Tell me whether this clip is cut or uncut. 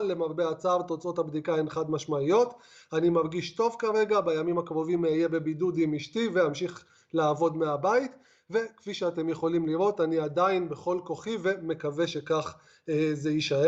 uncut